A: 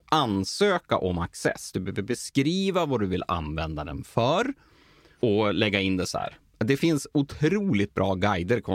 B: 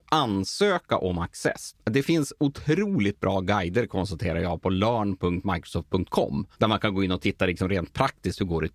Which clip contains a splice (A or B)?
B